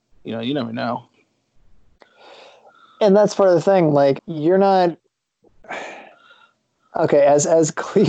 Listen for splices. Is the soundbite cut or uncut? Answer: cut